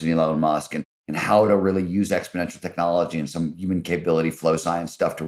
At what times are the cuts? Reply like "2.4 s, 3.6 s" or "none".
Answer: none